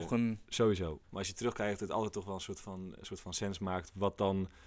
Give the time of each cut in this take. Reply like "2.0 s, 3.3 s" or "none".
1.0 s